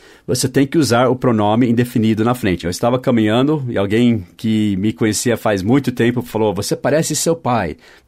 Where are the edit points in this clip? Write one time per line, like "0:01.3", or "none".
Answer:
0:02.6